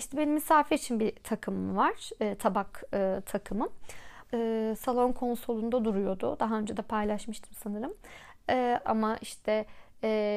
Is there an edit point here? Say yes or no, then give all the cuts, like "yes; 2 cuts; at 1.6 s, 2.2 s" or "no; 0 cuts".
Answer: yes; 2 cuts; at 4.3 s, 8.8 s